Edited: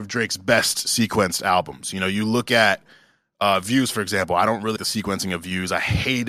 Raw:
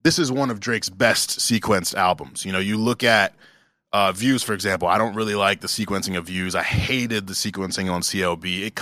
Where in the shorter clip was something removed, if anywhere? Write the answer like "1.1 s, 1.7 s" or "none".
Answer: 4.8 s